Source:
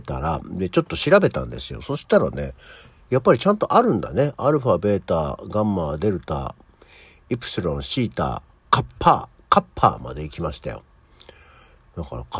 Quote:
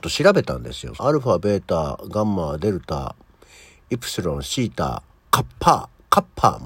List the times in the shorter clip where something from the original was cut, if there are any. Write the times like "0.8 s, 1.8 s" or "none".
1.0 s